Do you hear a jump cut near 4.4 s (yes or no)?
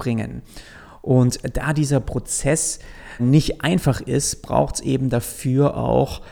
no